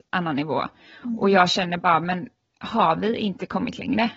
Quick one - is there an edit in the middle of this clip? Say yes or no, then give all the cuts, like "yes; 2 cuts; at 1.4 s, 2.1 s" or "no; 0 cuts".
no; 0 cuts